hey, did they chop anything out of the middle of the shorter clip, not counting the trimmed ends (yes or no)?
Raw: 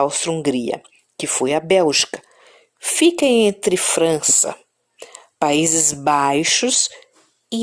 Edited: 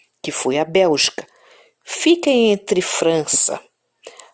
no